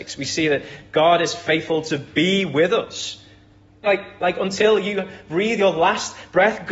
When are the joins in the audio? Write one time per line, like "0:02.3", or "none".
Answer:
0:03.8